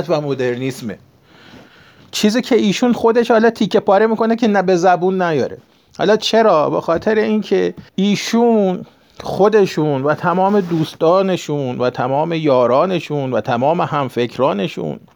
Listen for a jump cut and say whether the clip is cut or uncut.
cut